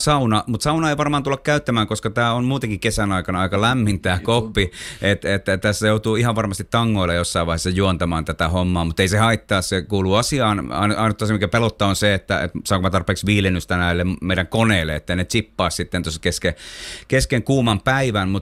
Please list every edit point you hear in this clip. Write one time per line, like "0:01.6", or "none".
none

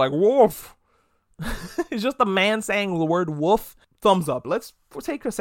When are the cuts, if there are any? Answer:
0:04.4

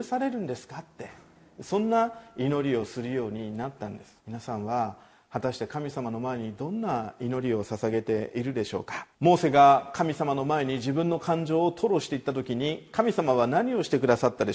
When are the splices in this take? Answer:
0:04.2
0:09.1

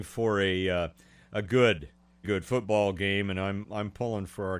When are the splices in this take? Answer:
0:02.2
0:03.6

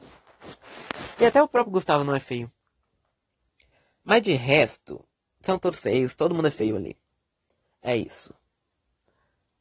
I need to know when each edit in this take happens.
none

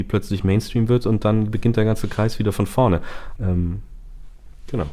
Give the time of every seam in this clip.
0:03.4

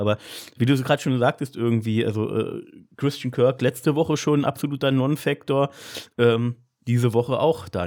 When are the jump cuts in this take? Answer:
none

